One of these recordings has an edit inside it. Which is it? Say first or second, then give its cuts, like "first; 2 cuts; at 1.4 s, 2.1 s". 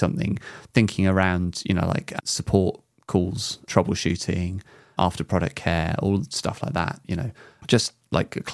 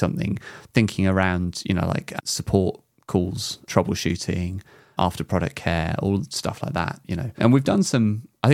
second; 1 cut; at 7.4 s